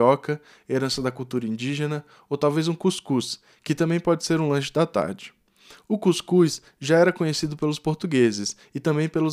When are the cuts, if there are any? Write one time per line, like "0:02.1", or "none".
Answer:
none